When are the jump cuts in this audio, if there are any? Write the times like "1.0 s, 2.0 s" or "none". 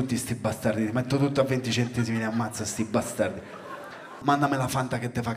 4.2 s